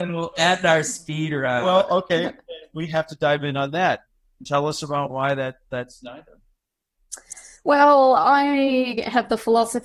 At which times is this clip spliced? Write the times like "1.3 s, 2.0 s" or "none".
none